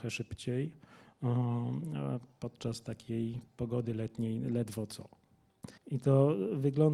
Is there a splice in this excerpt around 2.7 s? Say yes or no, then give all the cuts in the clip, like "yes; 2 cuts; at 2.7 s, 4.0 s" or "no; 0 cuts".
no; 1 cut; at 5.8 s